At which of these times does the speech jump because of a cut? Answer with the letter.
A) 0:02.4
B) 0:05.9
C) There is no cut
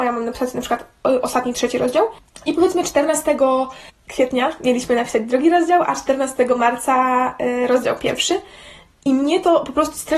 C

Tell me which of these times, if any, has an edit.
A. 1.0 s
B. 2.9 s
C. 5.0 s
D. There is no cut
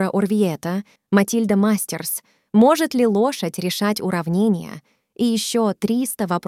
A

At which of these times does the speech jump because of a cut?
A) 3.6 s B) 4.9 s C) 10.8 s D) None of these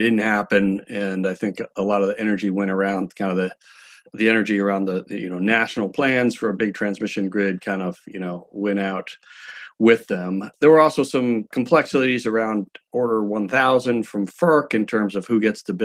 D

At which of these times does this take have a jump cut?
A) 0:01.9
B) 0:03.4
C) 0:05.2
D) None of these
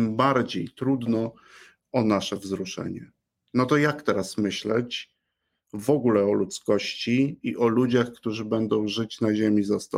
D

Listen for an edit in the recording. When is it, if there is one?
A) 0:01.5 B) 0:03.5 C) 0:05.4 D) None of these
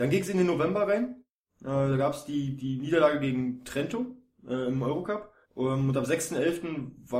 C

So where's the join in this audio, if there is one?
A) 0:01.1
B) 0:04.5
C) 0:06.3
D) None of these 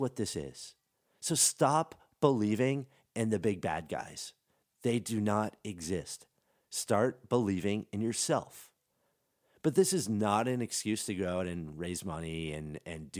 D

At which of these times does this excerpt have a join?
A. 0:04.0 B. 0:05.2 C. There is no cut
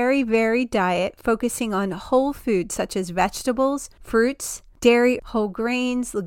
B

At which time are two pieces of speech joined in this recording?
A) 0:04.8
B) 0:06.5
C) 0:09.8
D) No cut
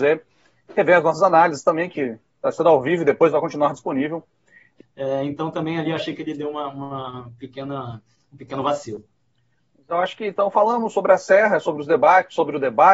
A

